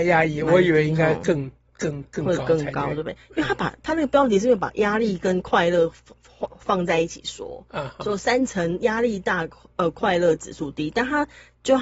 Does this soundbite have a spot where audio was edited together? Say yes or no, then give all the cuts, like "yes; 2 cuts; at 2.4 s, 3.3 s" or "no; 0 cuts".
no; 0 cuts